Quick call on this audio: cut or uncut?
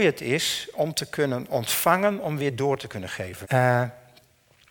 cut